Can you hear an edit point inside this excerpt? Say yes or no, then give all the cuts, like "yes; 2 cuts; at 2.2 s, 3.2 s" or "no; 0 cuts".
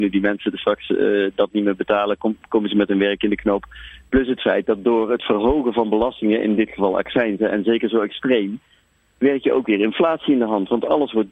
no; 0 cuts